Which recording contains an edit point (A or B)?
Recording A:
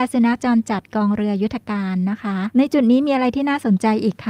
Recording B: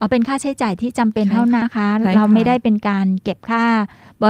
B